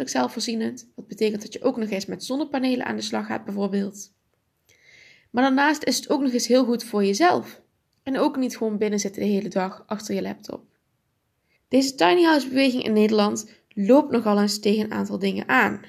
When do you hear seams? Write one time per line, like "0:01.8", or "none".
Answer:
0:07.9
0:11.6